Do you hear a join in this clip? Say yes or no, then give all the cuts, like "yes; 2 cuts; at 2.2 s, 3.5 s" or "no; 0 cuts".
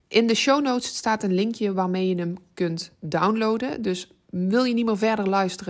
no; 0 cuts